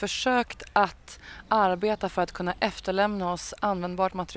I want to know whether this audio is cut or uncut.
uncut